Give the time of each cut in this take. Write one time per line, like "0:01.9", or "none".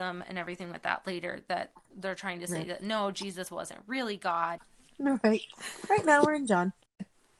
0:04.6